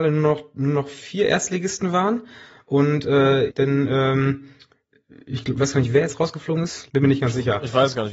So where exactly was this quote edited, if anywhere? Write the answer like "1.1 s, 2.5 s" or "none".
3.5 s, 6.9 s